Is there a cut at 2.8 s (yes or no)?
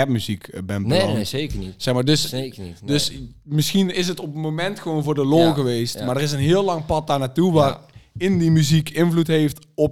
no